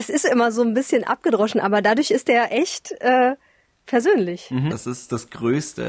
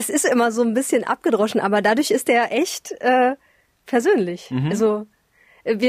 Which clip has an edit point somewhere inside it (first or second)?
first